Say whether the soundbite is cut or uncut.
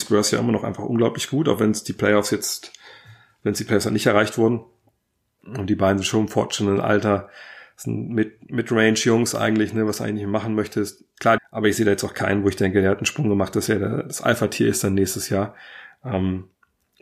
cut